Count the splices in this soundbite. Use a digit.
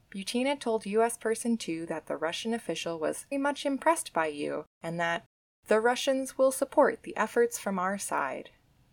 2